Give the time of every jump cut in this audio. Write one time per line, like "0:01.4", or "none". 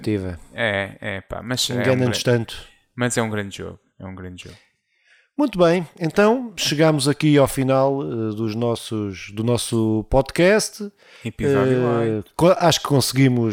none